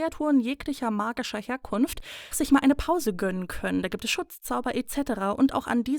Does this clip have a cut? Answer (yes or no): yes